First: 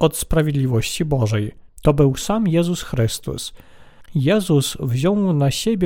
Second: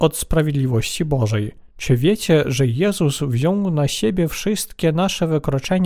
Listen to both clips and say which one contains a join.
first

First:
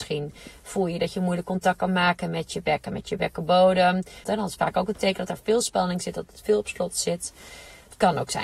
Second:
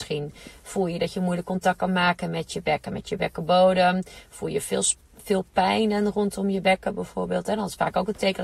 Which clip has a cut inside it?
first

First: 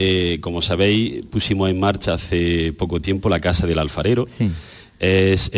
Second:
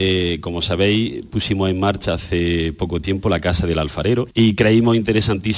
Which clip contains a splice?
second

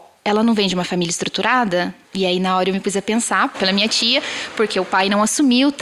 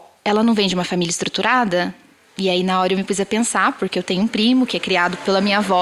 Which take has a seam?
first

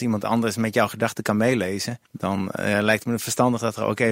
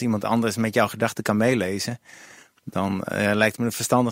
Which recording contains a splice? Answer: first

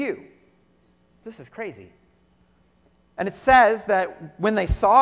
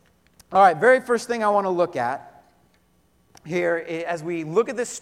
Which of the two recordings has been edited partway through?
first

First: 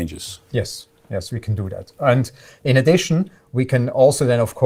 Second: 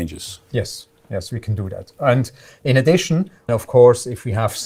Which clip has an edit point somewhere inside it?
second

